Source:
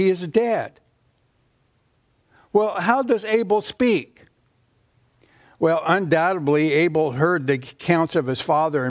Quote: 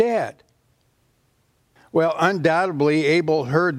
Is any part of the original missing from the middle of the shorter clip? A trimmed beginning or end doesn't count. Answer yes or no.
yes